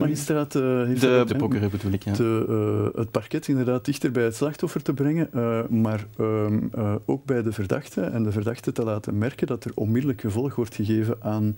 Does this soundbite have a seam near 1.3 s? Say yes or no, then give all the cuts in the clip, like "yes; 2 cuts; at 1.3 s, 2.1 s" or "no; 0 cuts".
yes; 1 cut; at 1.3 s